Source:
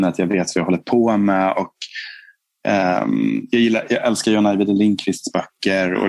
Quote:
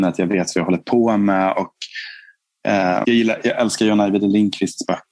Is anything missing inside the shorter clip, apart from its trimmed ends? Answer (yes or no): yes